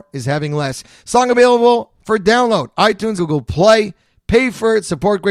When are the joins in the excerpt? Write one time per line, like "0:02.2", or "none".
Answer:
0:03.2

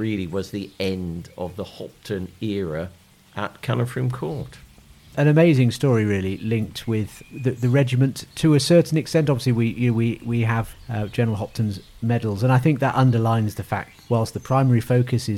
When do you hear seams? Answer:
none

